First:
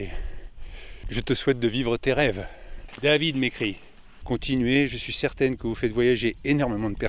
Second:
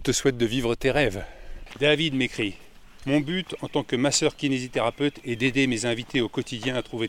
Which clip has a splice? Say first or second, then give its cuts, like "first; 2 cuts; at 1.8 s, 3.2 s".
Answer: first; 1 cut; at 4.2 s